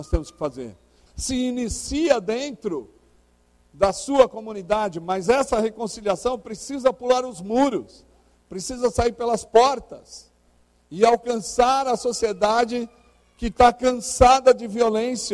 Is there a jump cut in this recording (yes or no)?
yes